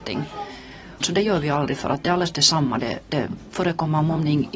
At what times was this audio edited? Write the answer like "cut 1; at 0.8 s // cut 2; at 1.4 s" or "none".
cut 1; at 1.0 s